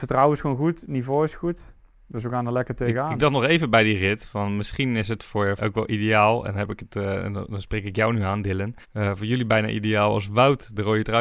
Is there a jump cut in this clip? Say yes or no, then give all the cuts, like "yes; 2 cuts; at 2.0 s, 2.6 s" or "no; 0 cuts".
yes; 2 cuts; at 5.6 s, 8.8 s